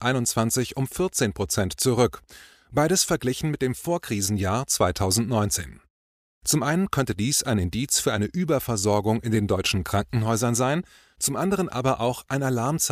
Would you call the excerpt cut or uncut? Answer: uncut